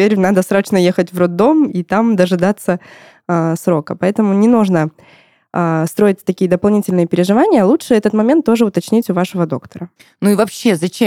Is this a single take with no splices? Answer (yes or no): yes